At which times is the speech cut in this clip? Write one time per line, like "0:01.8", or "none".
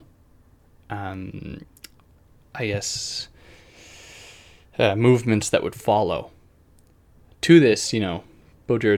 none